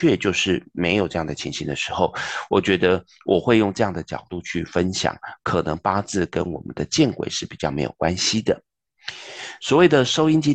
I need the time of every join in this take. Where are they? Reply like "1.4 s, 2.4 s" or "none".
9.6 s